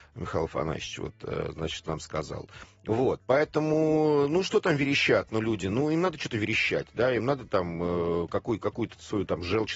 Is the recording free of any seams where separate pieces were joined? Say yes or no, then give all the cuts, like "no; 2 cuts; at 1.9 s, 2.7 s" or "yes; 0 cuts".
yes; 0 cuts